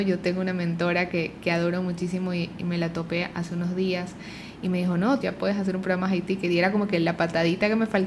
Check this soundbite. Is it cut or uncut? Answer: cut